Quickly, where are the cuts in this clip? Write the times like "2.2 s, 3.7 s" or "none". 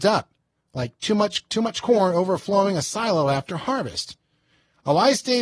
1.5 s